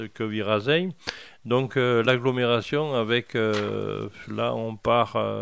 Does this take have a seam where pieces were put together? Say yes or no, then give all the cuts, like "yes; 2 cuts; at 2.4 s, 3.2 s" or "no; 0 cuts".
no; 0 cuts